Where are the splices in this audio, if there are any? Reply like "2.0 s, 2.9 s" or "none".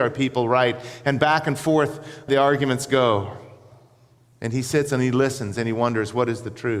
2.3 s